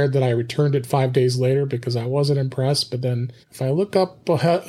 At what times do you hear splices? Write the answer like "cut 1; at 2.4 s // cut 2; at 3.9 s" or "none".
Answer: cut 1; at 3.4 s

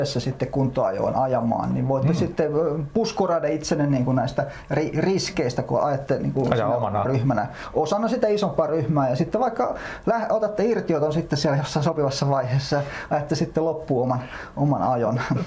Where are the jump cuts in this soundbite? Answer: cut 1; at 7.0 s

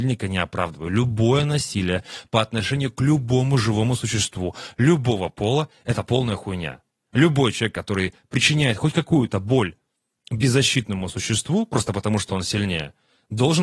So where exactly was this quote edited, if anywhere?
none

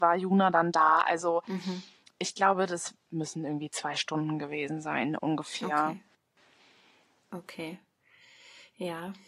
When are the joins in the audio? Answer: none

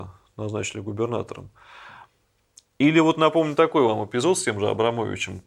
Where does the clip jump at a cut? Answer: none

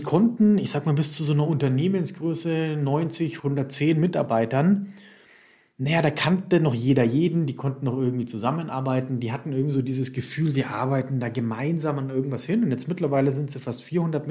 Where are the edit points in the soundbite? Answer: cut 1; at 3.4 s

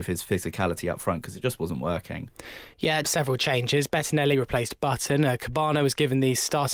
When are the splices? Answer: cut 1; at 3.0 s

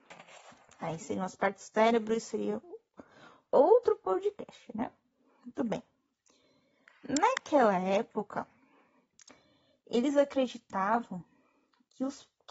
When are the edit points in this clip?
cut 1; at 3.5 s

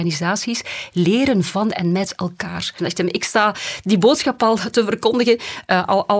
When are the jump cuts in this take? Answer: cut 1; at 2.8 s

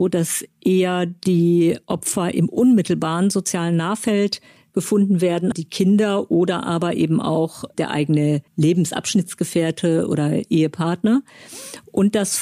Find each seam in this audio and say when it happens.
cut 1; at 5.5 s // cut 2; at 8.5 s

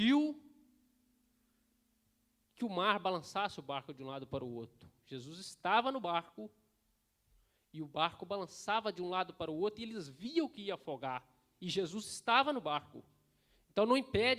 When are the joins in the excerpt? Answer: none

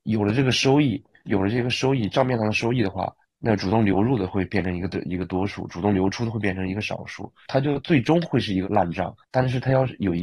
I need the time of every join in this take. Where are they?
none

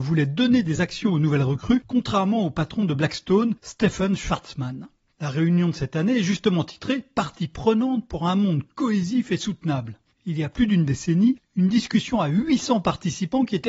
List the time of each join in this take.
cut 1; at 5.1 s // cut 2; at 10.1 s

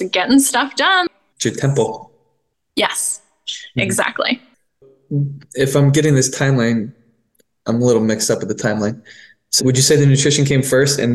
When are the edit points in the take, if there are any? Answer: cut 1; at 1.3 s // cut 2; at 9.6 s

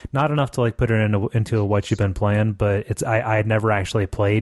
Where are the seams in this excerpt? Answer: none

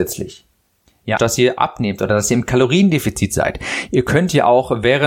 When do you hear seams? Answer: cut 1; at 1.2 s

